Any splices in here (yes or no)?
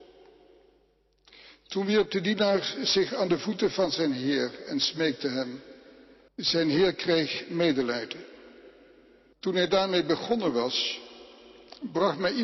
yes